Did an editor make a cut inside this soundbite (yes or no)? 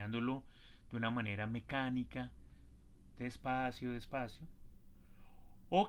no